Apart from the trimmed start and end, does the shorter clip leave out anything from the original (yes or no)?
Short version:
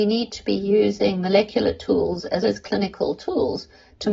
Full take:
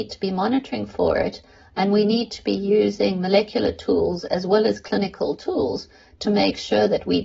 yes